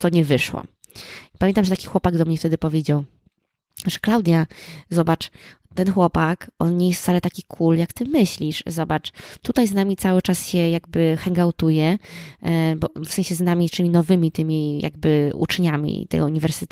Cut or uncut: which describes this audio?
uncut